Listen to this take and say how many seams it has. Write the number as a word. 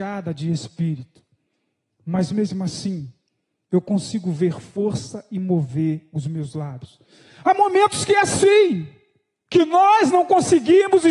zero